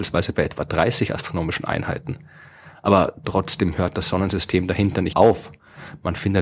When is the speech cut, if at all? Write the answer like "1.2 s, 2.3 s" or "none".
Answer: 5.1 s